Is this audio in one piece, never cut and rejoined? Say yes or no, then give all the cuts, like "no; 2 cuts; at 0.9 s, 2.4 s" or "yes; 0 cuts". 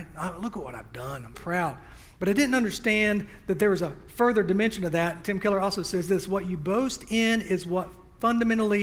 no; 1 cut; at 1.3 s